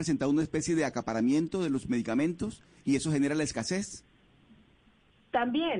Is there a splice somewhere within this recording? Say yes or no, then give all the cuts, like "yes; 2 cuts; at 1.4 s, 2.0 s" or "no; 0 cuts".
no; 0 cuts